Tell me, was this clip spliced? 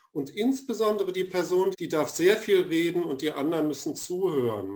yes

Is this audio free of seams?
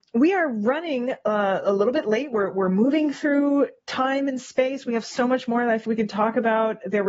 no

